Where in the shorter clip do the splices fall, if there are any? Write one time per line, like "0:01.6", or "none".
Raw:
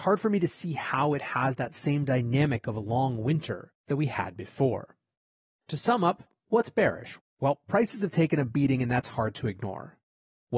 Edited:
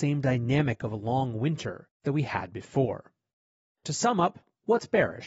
none